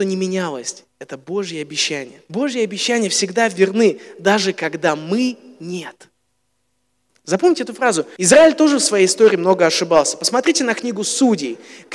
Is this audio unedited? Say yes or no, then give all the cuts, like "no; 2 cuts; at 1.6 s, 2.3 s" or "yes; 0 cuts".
no; 2 cuts; at 2.3 s, 8.2 s